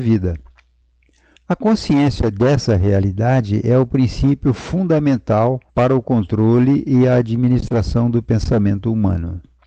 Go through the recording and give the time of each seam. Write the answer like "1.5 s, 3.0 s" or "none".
1.4 s, 5.7 s